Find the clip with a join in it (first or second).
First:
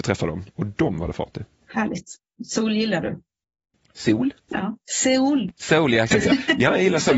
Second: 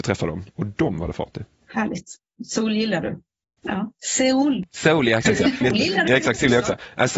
second